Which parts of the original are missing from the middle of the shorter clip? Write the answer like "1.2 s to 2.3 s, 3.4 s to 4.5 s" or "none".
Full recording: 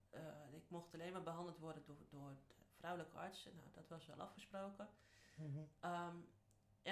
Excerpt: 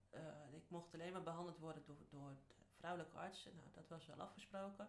none